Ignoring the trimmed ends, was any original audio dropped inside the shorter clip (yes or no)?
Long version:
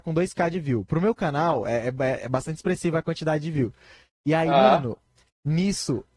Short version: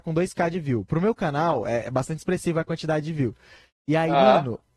yes